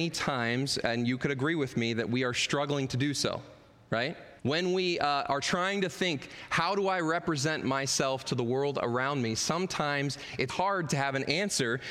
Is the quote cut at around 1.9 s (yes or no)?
no